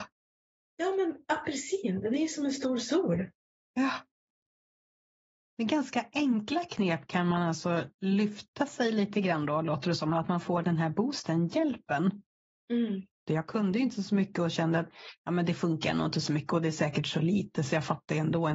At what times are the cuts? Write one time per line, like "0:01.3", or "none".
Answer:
0:13.3